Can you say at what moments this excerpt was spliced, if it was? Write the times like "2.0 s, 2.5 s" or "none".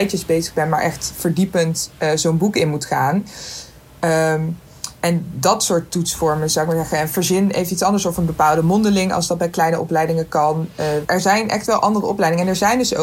11.0 s